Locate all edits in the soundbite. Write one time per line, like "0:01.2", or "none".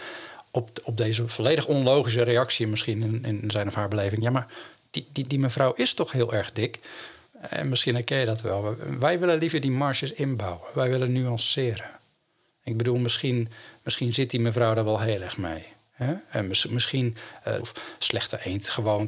0:17.6